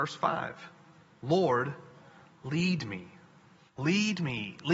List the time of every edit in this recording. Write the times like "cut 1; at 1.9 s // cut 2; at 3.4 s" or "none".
cut 1; at 3.7 s